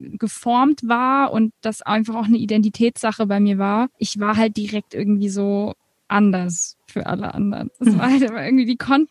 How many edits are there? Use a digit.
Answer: 1